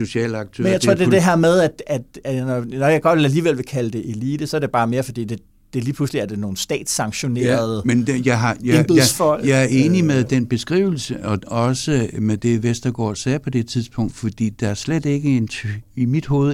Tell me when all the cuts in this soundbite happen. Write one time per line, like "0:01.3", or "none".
none

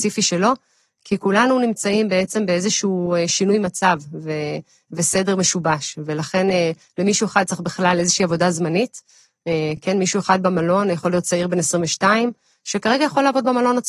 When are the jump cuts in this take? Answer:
none

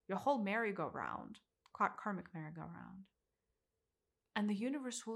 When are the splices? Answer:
0:01.6

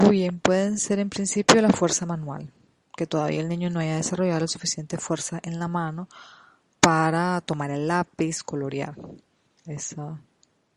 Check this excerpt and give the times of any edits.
0:09.7

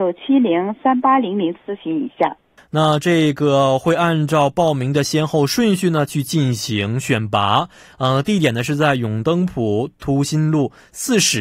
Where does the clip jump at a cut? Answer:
0:02.6

